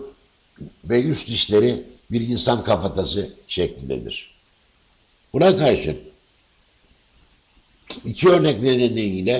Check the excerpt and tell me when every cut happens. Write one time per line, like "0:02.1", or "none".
0:05.2